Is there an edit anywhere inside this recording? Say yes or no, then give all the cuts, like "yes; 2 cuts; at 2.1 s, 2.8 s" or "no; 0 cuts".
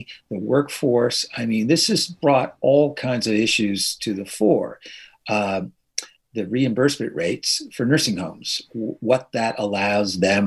no; 0 cuts